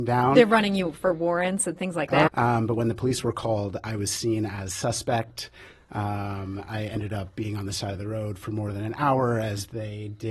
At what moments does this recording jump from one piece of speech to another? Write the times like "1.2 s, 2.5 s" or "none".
2.3 s